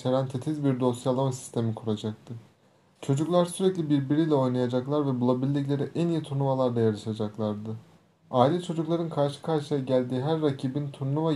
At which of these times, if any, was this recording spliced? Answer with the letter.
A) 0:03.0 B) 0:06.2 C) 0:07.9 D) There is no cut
A